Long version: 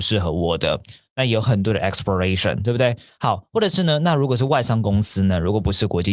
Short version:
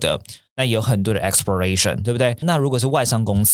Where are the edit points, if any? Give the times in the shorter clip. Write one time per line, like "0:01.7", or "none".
0:02.4